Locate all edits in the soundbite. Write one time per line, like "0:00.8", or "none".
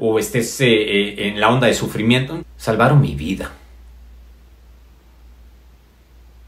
0:02.4